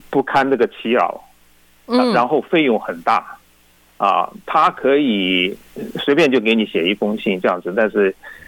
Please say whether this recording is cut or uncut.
uncut